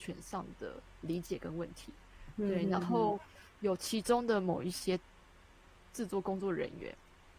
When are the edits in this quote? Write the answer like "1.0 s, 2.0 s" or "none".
none

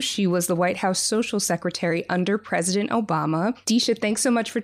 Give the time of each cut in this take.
3.6 s

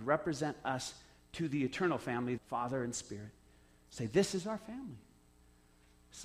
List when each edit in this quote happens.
2.4 s

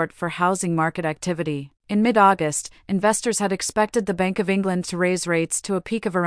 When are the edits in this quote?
1.8 s

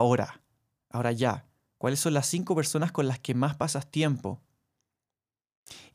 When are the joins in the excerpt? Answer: none

